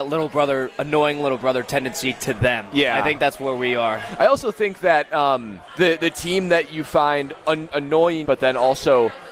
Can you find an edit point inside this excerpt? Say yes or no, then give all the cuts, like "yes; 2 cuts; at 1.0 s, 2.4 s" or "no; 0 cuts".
yes; 2 cuts; at 5.7 s, 8.2 s